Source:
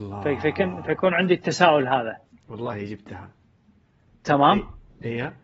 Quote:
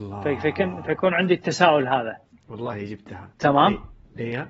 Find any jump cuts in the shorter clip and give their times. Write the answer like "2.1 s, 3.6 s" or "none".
3.3 s